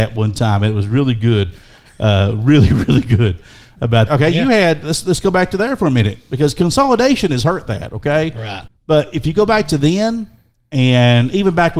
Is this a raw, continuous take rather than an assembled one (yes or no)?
no